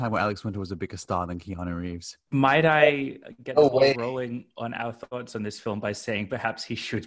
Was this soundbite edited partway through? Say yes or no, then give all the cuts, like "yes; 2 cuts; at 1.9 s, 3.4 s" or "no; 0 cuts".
no; 0 cuts